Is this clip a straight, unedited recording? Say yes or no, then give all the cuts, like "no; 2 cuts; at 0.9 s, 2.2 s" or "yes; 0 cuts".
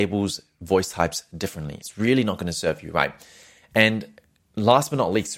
no; 1 cut; at 1.8 s